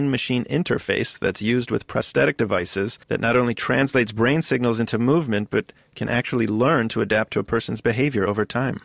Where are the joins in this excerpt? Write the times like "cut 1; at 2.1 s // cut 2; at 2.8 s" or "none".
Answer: cut 1; at 3.0 s